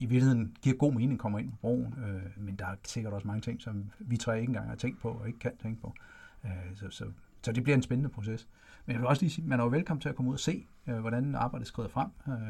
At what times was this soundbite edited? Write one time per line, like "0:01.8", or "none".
0:02.4
0:09.4